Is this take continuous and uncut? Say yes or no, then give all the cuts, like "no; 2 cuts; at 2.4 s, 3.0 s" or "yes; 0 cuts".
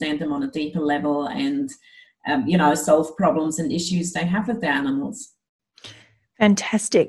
yes; 0 cuts